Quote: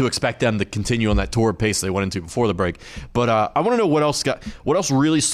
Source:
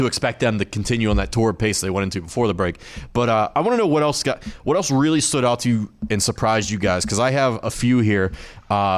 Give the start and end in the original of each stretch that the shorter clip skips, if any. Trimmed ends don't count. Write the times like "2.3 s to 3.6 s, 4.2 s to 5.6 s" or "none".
none